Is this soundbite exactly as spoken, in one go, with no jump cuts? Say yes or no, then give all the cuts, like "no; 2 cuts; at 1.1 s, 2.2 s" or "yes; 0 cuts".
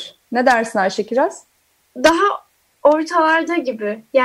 yes; 0 cuts